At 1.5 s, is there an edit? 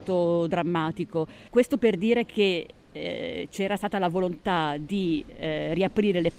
yes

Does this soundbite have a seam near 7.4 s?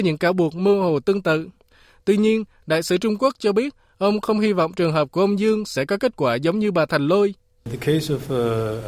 no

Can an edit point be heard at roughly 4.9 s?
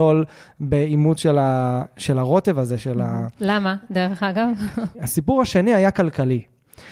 yes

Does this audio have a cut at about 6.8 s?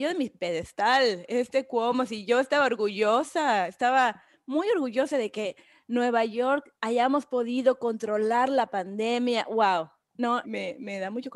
yes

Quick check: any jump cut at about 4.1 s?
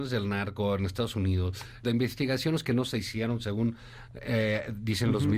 no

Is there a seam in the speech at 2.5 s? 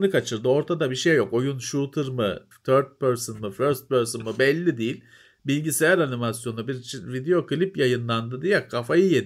yes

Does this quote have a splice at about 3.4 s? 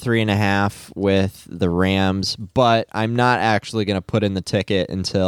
no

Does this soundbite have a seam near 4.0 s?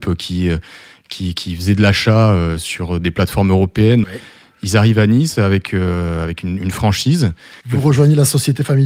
yes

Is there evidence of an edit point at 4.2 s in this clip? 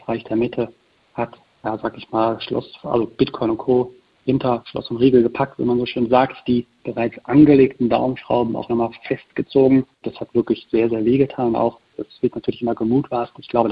no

